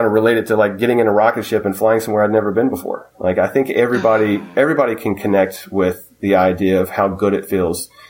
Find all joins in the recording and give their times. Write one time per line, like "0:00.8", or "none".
0:03.1